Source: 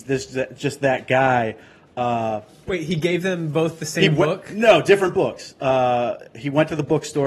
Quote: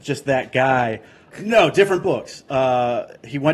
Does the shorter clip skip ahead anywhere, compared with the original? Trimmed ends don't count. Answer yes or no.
yes